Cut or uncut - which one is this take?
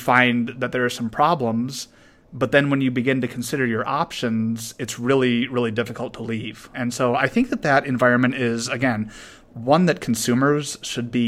uncut